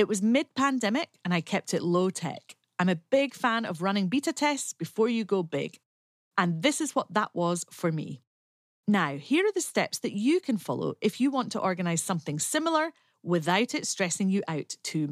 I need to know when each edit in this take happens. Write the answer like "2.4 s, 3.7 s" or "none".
none